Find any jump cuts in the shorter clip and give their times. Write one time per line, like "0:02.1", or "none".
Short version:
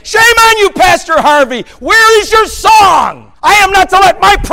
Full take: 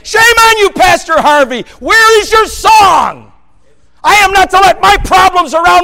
0:03.3

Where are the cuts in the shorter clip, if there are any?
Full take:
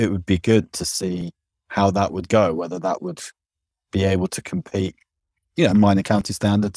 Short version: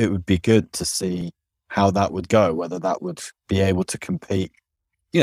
0:03.4

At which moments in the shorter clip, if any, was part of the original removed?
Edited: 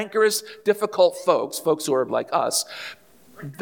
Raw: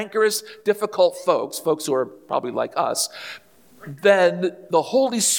0:02.1

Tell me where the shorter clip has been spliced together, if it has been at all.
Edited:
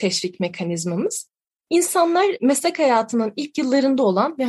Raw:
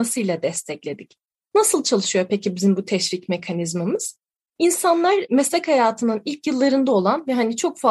none

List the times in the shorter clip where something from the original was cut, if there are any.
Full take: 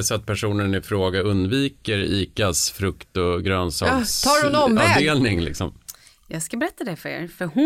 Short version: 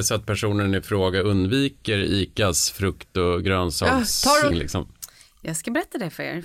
0:04.5

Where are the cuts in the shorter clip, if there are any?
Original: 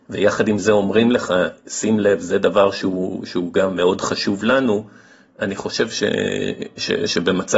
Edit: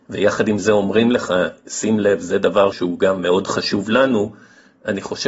0:02.7

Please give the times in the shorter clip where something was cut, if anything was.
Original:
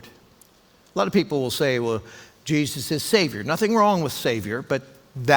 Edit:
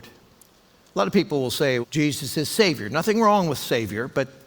0:01.8

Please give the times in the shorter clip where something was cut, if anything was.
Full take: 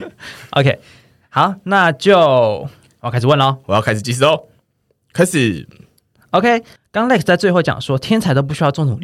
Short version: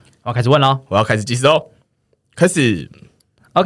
none

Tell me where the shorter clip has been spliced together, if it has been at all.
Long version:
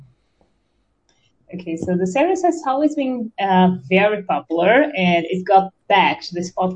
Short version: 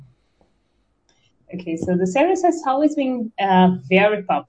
none

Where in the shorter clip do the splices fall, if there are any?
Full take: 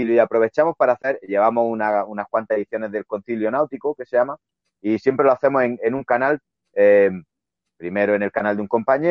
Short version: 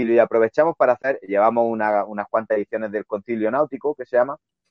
none

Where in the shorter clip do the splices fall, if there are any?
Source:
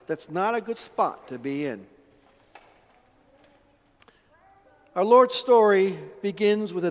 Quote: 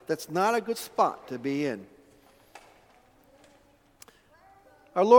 none

